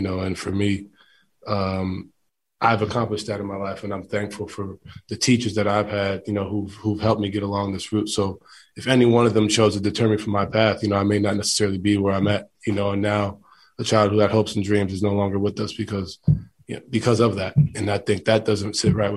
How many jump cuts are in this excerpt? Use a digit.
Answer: 0